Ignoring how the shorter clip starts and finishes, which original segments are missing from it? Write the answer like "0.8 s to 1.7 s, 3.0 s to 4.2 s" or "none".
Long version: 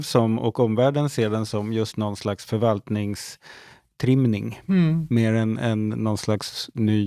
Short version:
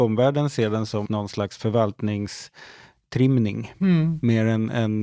1.7 s to 1.9 s